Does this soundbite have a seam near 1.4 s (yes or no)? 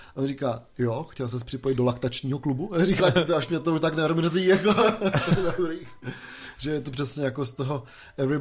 no